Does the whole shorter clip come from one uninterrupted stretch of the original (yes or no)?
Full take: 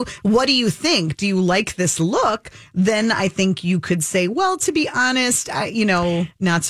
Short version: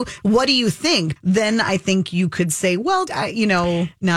no